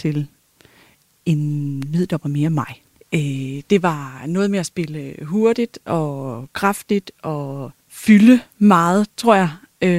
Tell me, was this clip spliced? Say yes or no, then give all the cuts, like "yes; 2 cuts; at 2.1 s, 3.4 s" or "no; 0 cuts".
yes; 2 cuts; at 3.0 s, 7.8 s